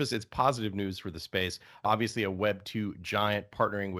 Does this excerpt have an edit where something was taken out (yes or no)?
yes